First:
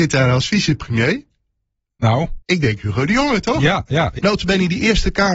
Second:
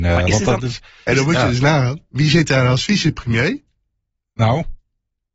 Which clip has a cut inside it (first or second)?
first